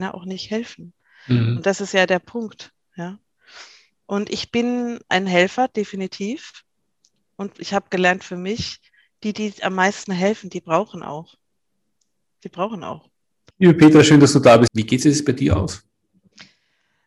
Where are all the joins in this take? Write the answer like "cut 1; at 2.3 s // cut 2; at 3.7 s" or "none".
cut 1; at 13.5 s // cut 2; at 14.7 s